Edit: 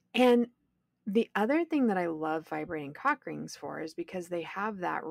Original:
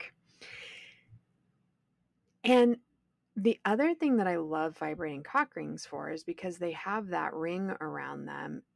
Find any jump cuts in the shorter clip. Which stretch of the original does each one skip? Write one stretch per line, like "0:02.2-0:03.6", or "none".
none